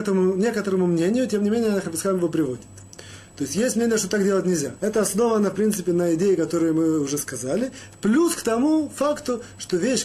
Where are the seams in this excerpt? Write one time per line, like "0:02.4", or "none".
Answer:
0:04.8